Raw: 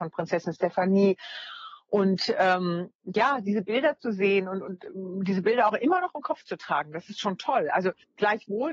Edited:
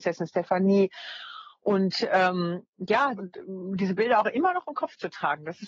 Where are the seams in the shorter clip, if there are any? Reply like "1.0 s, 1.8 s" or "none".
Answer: 3.2 s